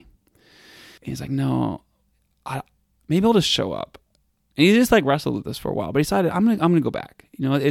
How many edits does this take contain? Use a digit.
1